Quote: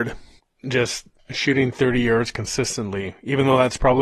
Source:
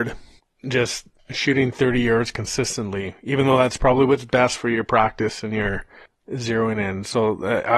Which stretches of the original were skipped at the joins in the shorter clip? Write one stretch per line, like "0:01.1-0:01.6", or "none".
none